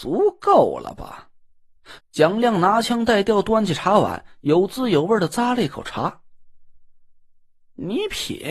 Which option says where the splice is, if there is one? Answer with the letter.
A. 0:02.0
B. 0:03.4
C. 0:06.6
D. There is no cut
A